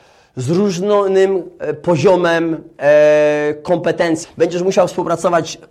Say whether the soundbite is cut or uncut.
cut